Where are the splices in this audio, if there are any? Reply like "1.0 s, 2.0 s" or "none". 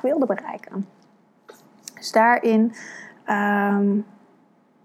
none